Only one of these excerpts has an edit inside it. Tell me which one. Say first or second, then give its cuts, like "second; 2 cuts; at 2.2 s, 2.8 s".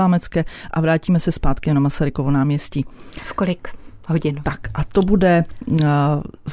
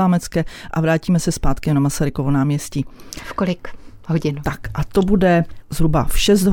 second; 1 cut; at 5.6 s